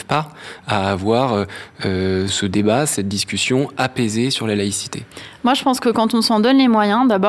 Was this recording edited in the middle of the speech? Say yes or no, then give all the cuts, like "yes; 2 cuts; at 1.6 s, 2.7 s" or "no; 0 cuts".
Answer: yes; 1 cut; at 2.3 s